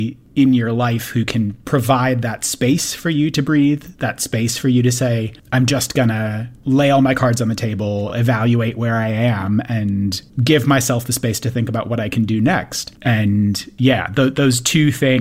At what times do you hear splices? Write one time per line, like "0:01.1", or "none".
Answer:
none

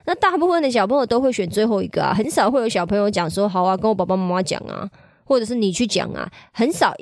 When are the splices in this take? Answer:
none

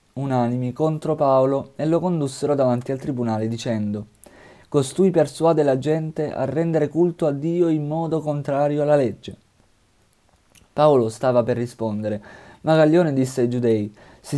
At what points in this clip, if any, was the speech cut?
none

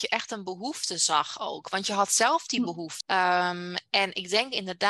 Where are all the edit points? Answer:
0:03.0

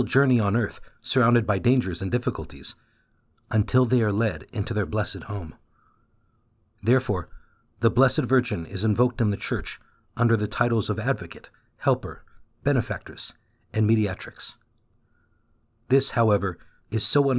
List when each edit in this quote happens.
none

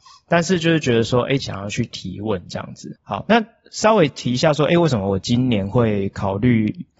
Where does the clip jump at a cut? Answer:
0:01.4
0:02.9

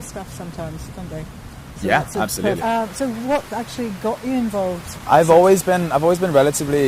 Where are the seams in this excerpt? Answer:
0:02.6
0:05.0

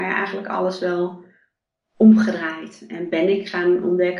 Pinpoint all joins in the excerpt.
none

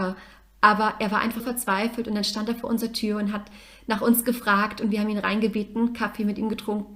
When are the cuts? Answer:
0:01.4

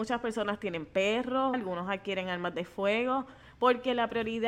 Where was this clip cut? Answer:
0:01.5

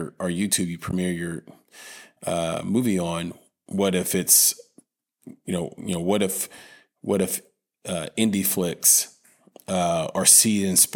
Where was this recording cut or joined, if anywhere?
none

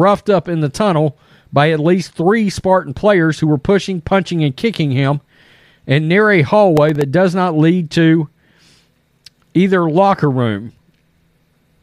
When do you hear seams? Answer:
none

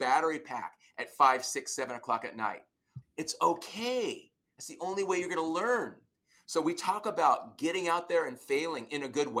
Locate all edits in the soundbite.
0:03.0

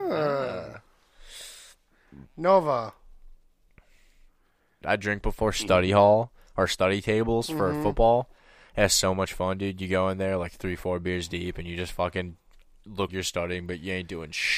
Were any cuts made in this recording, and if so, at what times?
0:04.8
0:13.1

